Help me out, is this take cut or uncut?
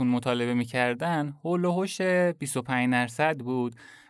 uncut